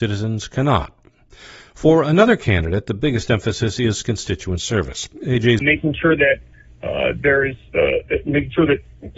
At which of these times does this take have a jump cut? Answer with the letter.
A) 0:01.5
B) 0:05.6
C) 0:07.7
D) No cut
B